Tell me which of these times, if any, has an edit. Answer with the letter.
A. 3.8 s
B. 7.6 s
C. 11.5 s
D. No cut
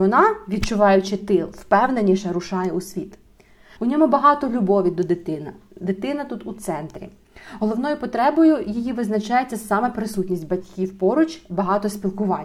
A